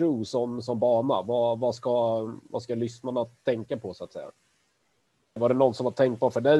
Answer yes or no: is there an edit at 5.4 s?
yes